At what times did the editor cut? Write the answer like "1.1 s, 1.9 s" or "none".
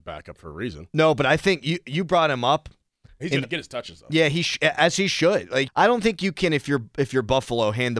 5.7 s